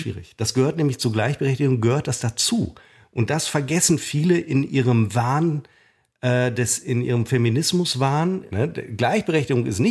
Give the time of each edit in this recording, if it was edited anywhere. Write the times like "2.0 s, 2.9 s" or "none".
8.5 s